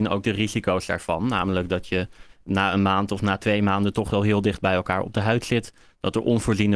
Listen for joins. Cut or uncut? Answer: uncut